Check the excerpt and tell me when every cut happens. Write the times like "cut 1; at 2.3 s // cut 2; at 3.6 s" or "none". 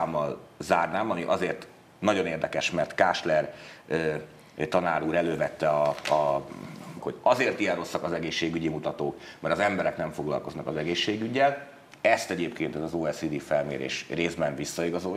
cut 1; at 7.0 s